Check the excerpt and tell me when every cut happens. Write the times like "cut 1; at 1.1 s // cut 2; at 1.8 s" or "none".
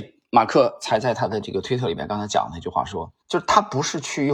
cut 1; at 3.2 s